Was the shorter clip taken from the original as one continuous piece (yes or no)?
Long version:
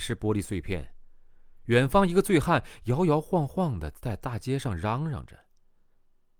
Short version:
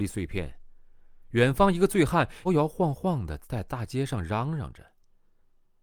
no